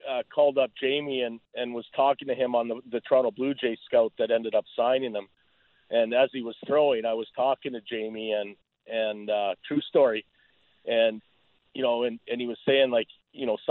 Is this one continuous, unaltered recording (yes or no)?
yes